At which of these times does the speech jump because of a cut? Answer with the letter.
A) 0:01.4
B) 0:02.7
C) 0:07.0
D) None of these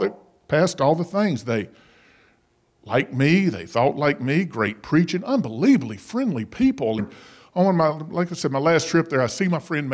C